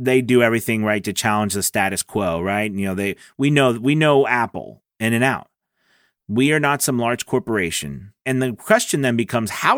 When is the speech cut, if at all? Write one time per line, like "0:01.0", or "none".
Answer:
0:06.2
0:08.2